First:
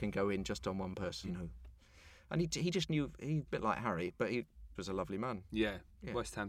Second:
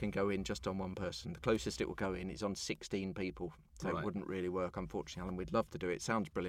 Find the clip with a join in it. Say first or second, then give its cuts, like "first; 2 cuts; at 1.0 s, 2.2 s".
first; 3 cuts; at 1.2 s, 3.5 s, 4.8 s